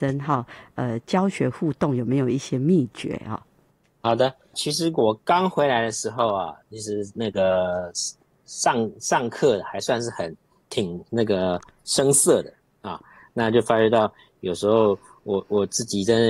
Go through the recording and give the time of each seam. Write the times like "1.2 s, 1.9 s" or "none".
4.5 s